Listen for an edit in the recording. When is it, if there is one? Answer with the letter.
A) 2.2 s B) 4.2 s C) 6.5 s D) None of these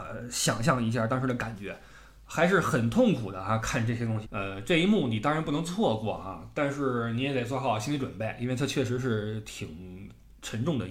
B